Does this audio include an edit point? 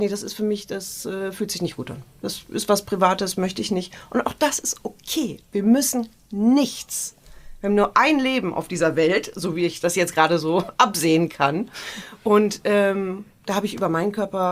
no; 0 cuts

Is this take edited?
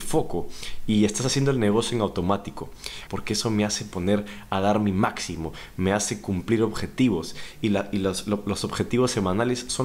yes; 1 cut; at 3.1 s

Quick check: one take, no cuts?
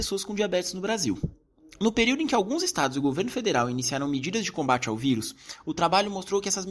yes; 0 cuts

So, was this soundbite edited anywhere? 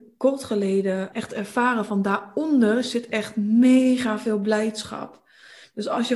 yes; 1 cut; at 1.1 s

